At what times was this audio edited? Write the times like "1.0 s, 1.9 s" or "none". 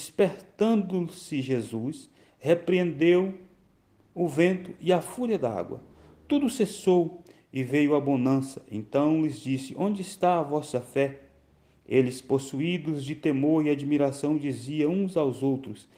none